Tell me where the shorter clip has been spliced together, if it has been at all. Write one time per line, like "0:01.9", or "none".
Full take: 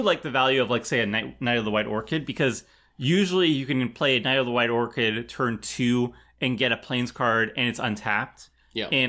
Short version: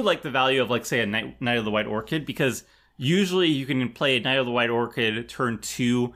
none